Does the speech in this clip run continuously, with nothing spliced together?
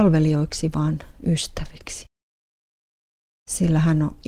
yes; 0 cuts

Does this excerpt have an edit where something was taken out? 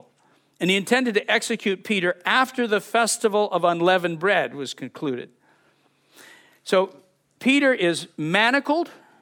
no; 0 cuts

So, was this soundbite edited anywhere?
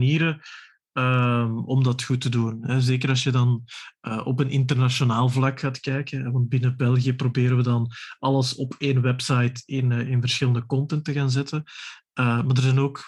no; 0 cuts

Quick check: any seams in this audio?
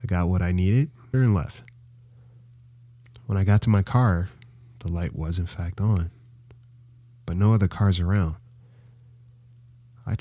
yes; 1 cut; at 1.1 s

